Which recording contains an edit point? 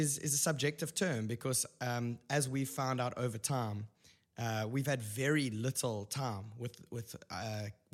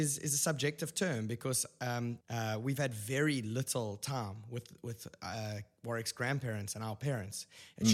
second; 1 cut; at 2.2 s

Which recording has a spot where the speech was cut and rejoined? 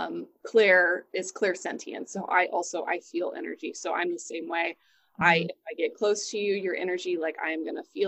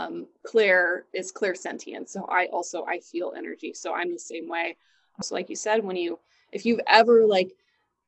second; 1 cut; at 5.2 s

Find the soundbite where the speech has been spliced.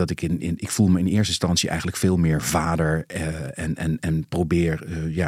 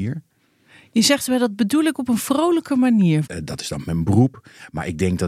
second; 1 cut; at 3.2 s

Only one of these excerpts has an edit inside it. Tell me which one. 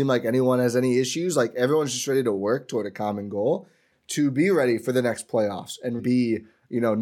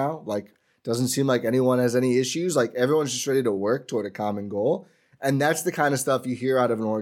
first; 2 cuts; at 3.9 s, 6.0 s

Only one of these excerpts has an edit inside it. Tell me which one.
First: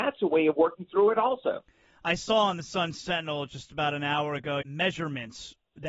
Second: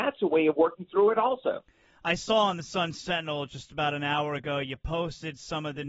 first; 1 cut; at 4.6 s

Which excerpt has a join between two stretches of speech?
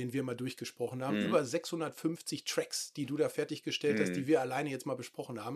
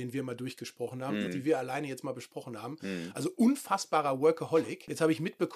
second; 1 cut; at 1.3 s

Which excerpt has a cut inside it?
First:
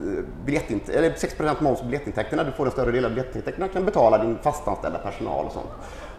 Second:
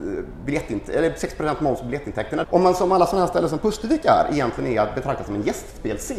second; 1 cut; at 2.4 s

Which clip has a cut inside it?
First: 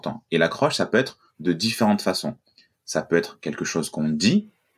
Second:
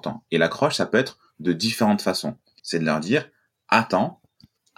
second; 1 cut; at 2.6 s

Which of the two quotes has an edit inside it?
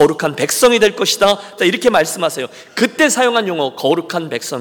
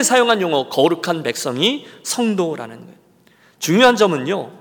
first; 1 cut; at 1.6 s

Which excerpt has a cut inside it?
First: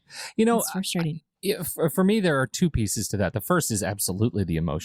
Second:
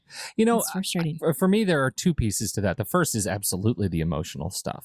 second; 1 cut; at 1.2 s

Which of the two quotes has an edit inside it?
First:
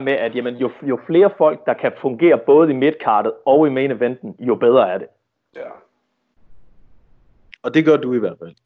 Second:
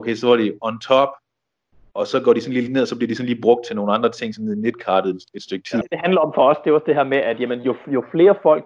second; 1 cut; at 5.8 s

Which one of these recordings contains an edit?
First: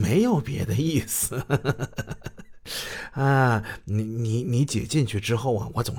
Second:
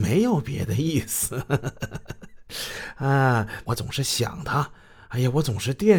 second; 2 cuts; at 1.6 s, 3.7 s

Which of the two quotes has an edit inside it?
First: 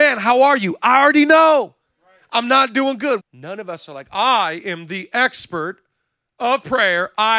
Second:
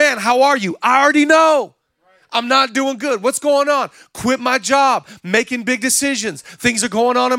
first; 1 cut; at 3.2 s

